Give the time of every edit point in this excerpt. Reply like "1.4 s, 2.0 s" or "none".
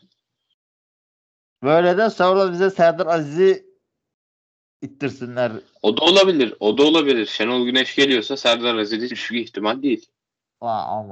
9.1 s